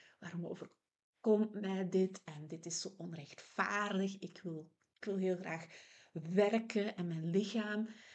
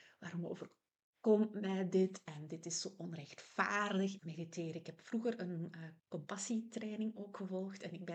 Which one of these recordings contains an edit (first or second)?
second